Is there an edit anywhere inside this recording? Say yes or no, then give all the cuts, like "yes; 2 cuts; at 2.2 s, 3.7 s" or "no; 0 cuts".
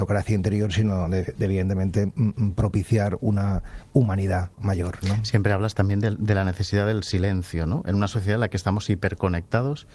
no; 0 cuts